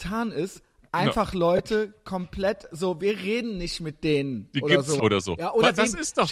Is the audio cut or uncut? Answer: cut